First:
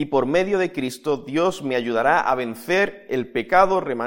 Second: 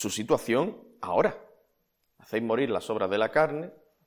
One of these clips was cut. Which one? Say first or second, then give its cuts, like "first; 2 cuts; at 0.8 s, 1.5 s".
second; 1 cut; at 2.1 s